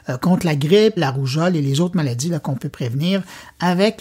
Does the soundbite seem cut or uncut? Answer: cut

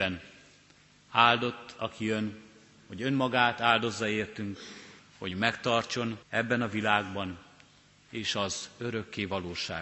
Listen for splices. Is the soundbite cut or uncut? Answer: cut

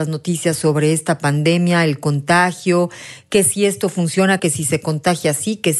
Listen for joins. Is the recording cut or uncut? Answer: cut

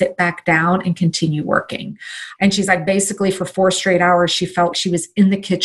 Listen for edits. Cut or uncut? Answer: cut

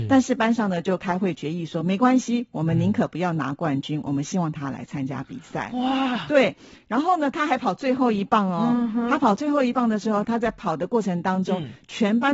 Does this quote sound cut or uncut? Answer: uncut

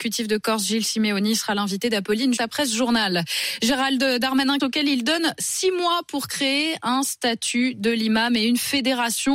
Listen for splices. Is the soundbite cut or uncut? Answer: cut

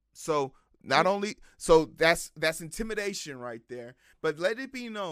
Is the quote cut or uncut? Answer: uncut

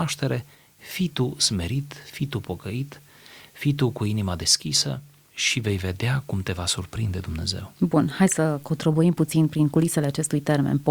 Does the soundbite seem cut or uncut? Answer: uncut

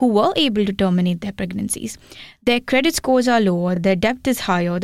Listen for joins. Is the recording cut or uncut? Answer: uncut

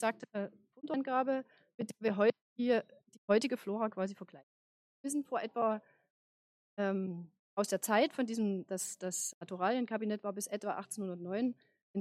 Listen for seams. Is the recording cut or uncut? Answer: cut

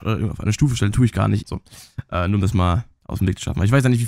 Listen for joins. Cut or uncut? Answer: cut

